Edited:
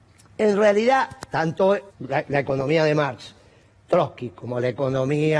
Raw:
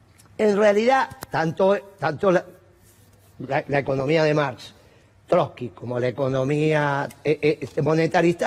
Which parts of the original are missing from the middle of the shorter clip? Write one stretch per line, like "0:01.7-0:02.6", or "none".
0:01.9-0:03.3